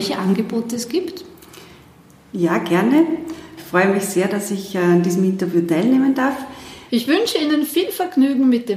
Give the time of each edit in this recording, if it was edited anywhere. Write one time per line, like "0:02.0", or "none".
0:03.6
0:06.9